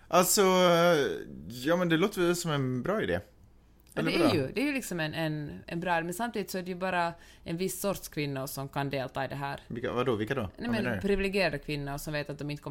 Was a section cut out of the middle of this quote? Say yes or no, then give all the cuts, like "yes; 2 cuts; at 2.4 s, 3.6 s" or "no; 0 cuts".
no; 0 cuts